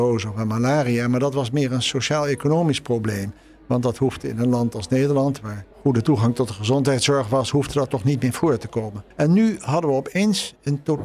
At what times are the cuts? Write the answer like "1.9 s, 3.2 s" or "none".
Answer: 5.7 s, 9.1 s